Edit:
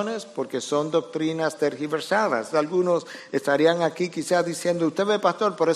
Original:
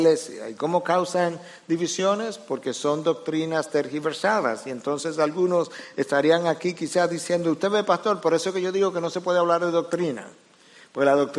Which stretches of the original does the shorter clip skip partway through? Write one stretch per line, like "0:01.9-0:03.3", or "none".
0:04.6-0:05.2